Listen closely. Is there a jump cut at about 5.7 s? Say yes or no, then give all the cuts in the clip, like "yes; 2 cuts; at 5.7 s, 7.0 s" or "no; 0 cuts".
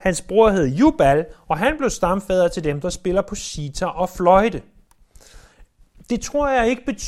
no; 0 cuts